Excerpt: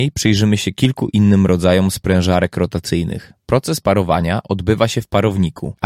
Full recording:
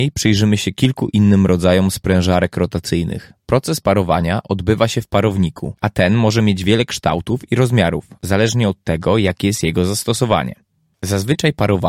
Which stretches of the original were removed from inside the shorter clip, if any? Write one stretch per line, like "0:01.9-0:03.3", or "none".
none